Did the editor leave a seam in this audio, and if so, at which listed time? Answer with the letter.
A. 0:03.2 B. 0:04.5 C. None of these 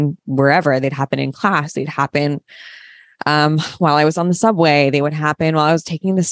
C